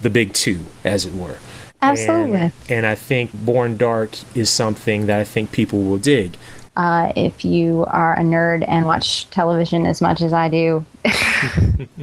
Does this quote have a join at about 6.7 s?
yes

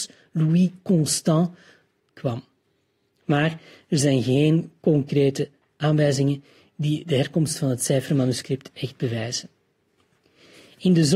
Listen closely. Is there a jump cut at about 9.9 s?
no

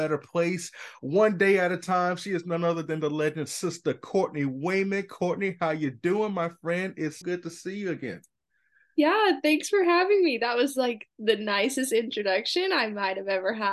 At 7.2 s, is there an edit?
yes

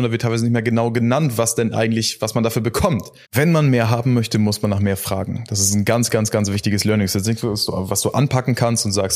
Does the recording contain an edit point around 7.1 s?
no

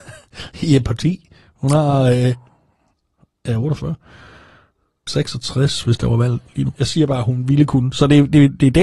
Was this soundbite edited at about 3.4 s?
no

